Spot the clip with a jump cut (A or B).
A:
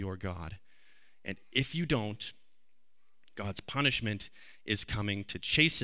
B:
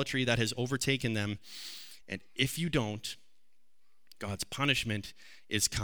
B